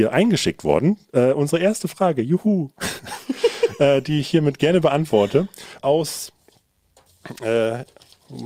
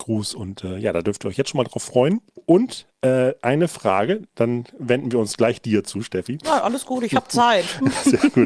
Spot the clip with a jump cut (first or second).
first